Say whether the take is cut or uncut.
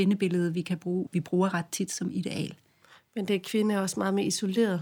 cut